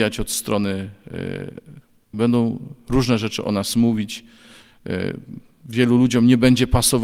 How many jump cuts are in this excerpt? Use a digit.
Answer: 1